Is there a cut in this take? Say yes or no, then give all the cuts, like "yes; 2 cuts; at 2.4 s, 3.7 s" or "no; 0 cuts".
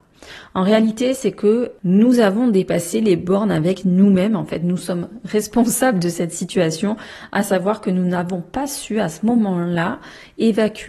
no; 0 cuts